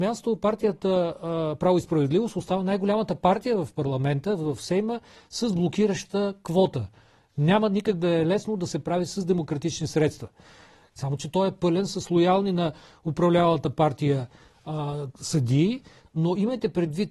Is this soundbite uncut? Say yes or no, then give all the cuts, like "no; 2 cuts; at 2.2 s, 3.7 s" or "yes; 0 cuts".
no; 2 cuts; at 11.0 s, 16.0 s